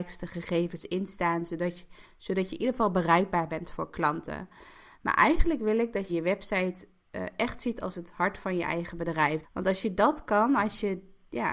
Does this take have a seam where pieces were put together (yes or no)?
yes